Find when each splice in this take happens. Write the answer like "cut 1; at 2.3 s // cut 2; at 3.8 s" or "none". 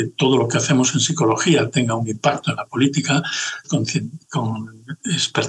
cut 1; at 3.6 s